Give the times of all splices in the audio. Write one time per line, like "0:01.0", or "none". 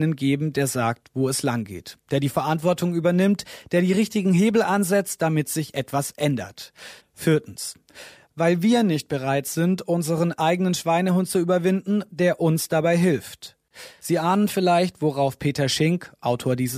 0:07.0
0:12.1